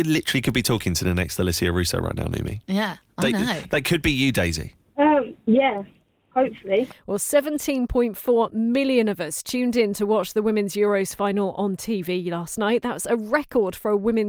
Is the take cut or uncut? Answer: uncut